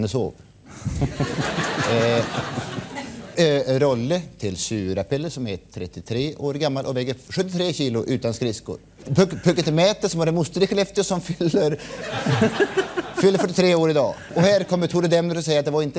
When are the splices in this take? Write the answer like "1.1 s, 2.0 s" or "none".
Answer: none